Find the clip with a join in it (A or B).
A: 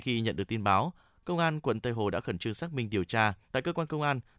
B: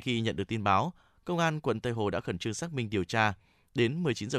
A